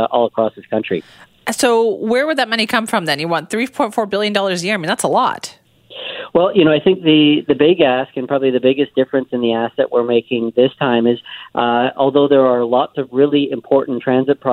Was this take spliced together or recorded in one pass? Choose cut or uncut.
cut